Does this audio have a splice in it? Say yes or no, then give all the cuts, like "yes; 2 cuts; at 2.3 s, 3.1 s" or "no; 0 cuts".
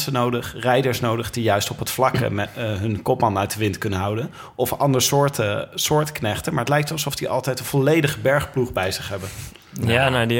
no; 0 cuts